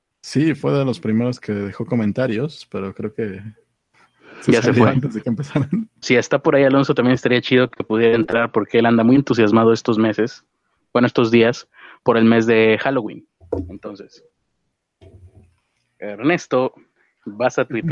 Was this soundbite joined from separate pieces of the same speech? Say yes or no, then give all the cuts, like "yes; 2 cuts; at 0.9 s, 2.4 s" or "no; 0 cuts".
yes; 1 cut; at 6.0 s